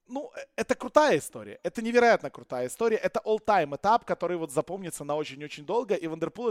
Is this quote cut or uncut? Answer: uncut